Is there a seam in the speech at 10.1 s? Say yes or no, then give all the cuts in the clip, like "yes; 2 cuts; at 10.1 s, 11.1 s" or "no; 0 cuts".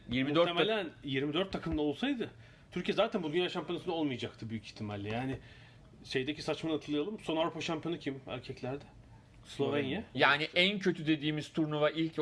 yes; 1 cut; at 10.1 s